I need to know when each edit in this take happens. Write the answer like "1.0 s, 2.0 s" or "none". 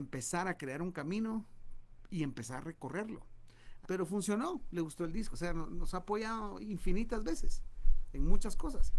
3.8 s, 5.3 s